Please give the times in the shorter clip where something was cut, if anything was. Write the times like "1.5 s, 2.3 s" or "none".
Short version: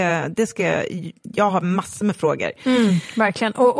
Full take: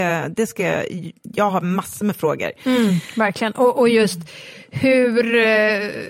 none